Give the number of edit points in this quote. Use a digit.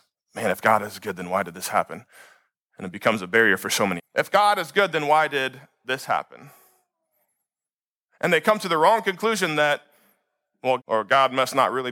2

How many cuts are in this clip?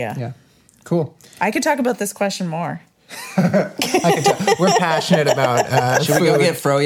1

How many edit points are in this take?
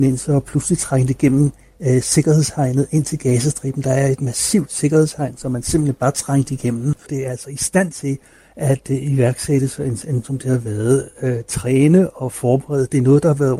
2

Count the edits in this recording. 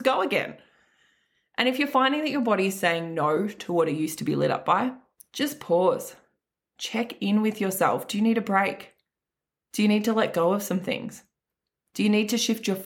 0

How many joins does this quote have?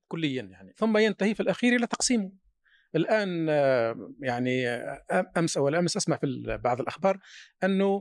0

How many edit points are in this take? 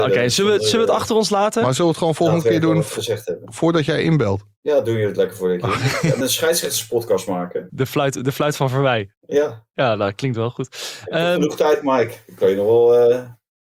2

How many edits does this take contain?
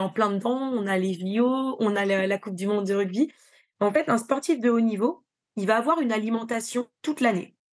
0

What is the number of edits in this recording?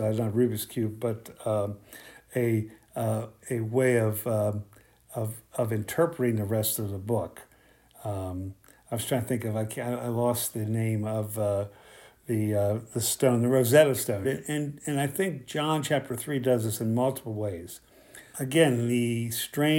2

